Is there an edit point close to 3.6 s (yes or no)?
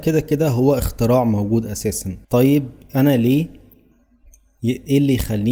no